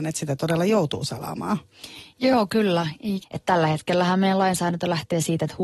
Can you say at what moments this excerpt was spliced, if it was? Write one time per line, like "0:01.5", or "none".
0:03.2